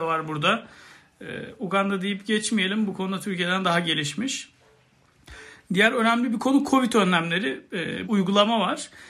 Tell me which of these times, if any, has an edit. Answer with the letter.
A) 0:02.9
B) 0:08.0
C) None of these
B